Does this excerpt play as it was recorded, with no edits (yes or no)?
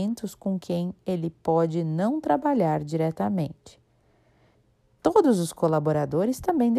no